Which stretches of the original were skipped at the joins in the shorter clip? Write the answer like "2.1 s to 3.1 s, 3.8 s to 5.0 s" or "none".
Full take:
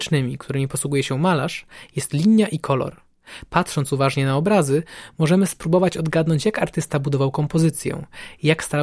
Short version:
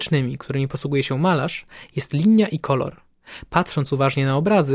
none